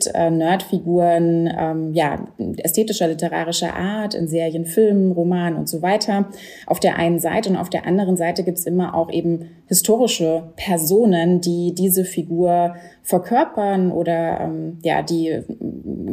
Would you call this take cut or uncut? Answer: uncut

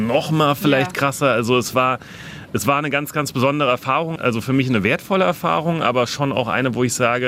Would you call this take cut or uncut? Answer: cut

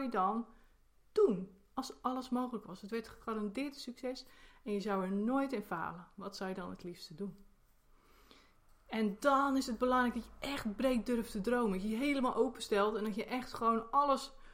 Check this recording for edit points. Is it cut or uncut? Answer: uncut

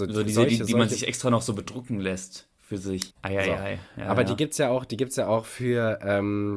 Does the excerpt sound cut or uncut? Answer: cut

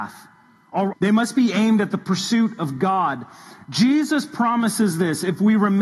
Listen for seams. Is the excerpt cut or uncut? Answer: cut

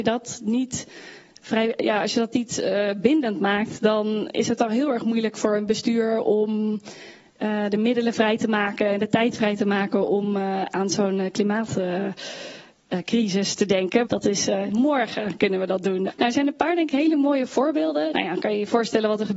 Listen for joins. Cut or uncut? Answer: cut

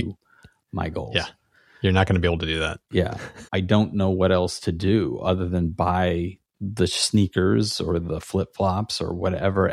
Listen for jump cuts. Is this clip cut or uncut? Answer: cut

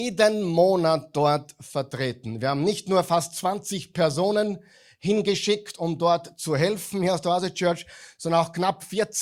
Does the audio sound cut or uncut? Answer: uncut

